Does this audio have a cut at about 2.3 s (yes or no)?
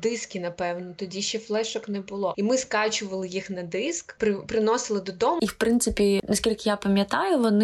yes